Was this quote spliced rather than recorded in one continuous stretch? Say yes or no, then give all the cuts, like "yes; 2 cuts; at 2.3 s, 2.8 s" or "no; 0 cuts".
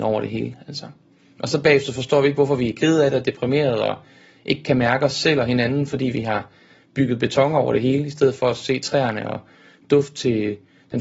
no; 0 cuts